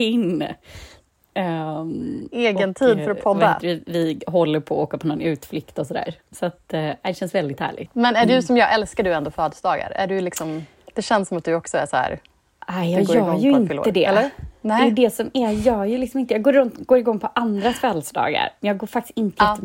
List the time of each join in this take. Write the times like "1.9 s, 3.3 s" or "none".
none